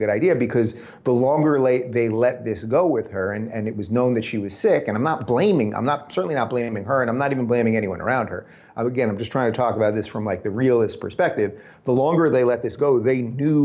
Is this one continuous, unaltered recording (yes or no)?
yes